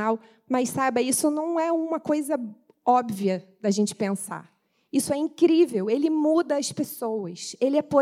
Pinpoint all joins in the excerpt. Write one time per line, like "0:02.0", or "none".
none